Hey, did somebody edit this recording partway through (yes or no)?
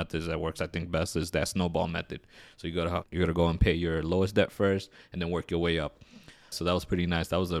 yes